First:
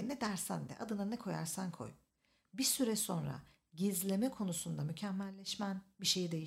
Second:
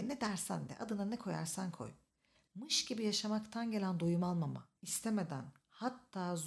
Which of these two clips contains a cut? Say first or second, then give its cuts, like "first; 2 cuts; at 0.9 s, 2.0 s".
second; 2 cuts; at 2.3 s, 4.8 s